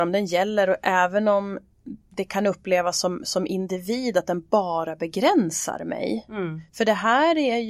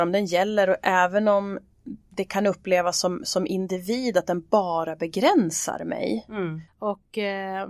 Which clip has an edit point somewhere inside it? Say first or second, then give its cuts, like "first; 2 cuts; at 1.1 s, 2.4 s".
second; 1 cut; at 6.7 s